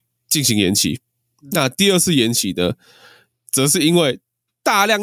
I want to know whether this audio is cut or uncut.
uncut